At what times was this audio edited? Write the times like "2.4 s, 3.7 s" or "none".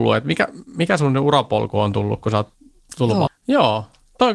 3.3 s

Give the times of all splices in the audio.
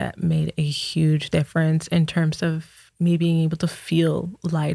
none

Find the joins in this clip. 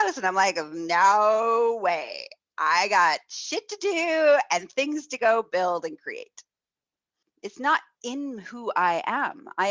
7.2 s

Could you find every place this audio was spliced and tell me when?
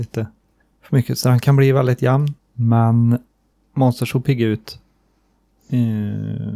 2.4 s

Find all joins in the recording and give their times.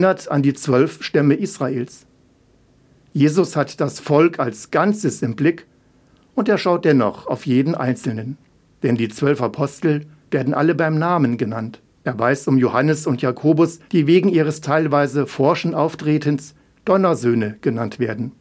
11.9 s, 13.9 s

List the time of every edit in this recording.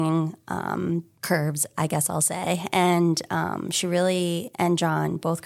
none

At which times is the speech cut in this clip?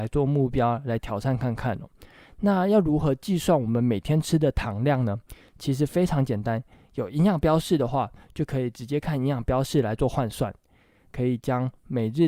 11.1 s

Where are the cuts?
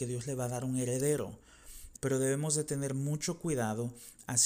1.9 s

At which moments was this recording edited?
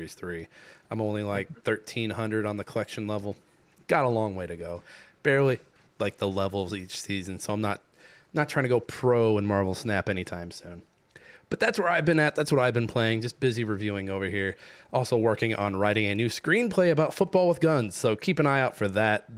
5.9 s

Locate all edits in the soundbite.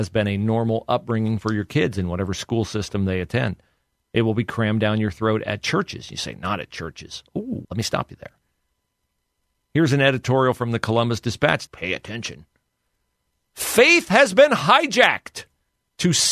7.6 s, 11.7 s

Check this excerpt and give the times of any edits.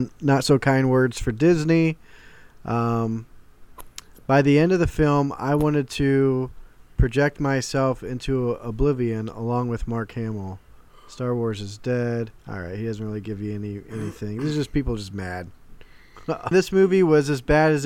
12.4 s, 16.5 s

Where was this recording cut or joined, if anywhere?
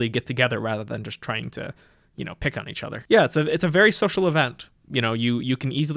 none

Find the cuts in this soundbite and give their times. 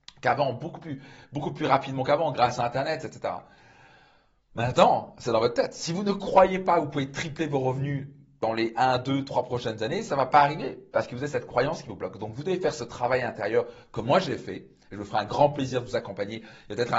none

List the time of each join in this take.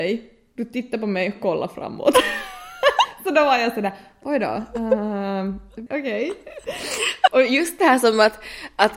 5.9 s, 7.3 s

